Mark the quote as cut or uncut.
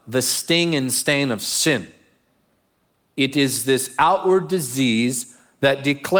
uncut